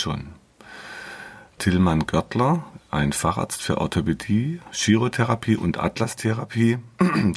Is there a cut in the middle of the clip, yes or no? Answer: yes